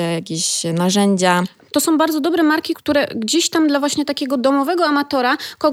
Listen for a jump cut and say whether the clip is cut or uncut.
cut